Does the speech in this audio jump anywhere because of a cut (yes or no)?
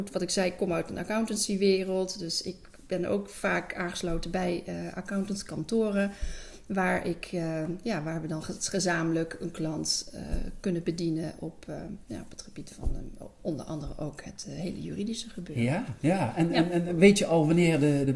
no